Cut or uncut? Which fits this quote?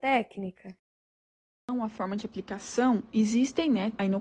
uncut